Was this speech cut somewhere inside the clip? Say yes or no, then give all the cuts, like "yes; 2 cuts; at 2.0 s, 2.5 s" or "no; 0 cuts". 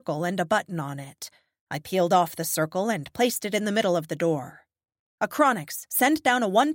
no; 0 cuts